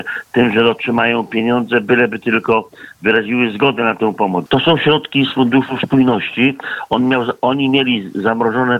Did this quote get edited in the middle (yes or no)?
yes